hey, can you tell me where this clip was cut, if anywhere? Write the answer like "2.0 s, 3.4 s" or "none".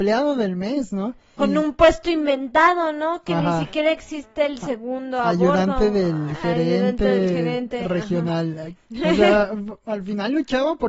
1.4 s, 8.7 s